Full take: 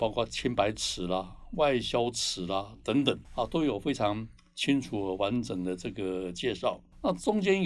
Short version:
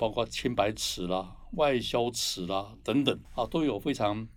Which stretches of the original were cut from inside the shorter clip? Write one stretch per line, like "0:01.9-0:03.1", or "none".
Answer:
none